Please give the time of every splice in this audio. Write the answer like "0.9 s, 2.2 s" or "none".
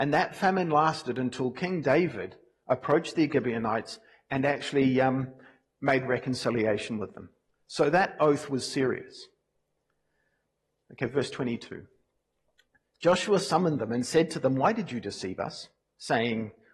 none